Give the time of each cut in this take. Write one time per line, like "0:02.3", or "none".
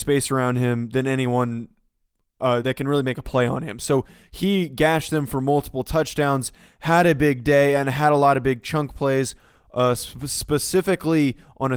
0:02.6